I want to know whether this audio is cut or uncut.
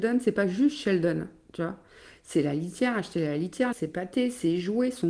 cut